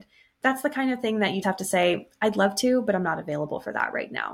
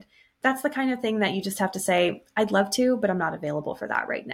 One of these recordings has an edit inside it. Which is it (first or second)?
first